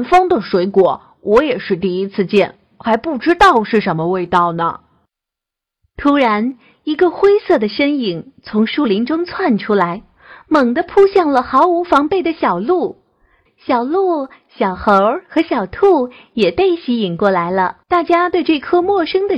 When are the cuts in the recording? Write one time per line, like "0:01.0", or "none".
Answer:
0:13.5
0:17.8